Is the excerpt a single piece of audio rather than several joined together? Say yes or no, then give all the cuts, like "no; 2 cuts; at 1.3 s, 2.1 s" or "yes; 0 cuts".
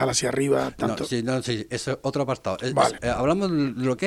no; 1 cut; at 3.0 s